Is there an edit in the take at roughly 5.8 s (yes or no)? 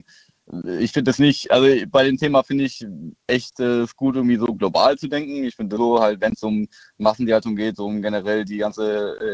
yes